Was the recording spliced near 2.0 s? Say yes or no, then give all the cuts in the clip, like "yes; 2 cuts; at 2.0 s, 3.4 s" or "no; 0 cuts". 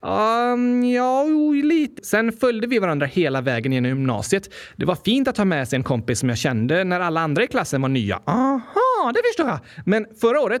yes; 1 cut; at 2.0 s